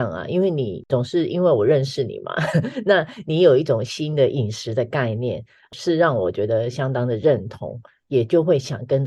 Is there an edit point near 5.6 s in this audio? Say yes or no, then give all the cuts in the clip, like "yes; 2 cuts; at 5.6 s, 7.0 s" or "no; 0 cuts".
no; 0 cuts